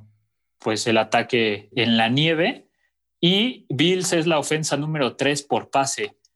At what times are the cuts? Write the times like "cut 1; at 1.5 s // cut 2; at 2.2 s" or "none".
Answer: cut 1; at 1.7 s